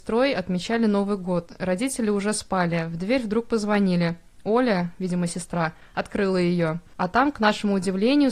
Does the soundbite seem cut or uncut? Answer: uncut